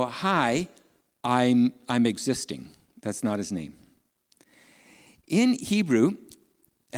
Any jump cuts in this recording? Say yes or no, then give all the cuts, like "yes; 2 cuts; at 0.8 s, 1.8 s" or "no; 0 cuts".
no; 0 cuts